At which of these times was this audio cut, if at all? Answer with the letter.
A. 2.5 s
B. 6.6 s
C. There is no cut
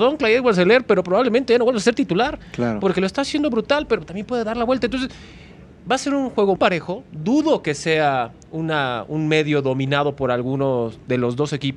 B